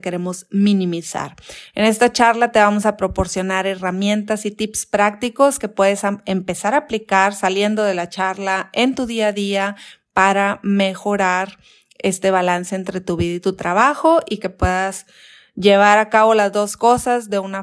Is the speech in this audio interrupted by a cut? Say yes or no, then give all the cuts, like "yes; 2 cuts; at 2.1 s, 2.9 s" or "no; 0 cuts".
no; 0 cuts